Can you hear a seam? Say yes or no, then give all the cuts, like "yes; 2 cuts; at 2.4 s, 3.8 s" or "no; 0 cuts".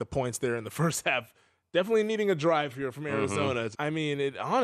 yes; 1 cut; at 3.7 s